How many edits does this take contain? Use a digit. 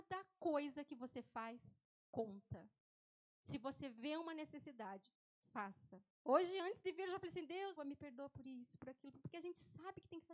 3